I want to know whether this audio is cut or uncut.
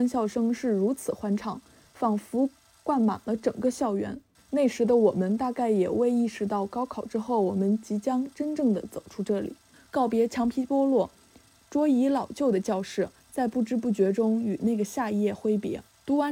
uncut